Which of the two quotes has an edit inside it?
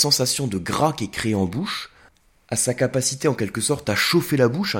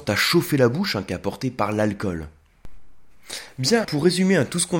second; 1 cut; at 3.8 s

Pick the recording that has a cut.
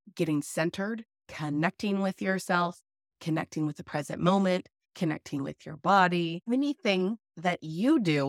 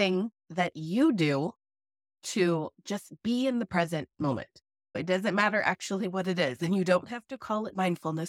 first; 1 cut; at 1.2 s

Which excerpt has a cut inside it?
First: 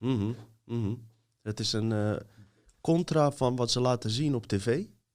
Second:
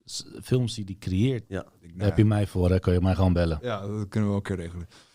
second; 1 cut; at 1.4 s

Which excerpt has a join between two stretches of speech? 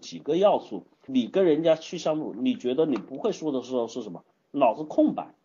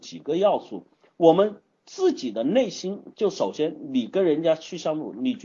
first; 1 cut; at 1.1 s

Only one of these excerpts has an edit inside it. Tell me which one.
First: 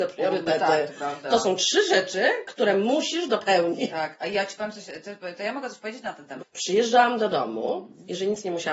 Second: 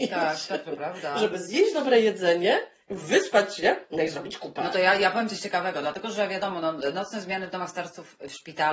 first; 2 cuts; at 3.9 s, 6.4 s

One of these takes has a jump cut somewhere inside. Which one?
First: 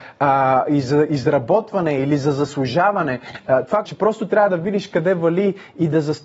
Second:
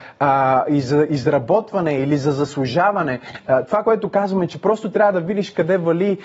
first; 1 cut; at 3.8 s

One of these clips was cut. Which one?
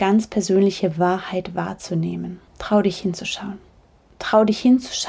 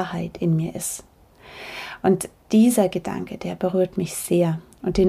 first; 1 cut; at 2.5 s

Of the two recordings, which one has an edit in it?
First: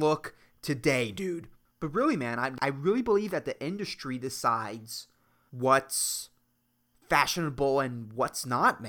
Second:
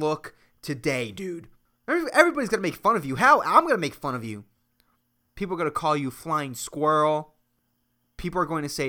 first; 1 cut; at 1.7 s

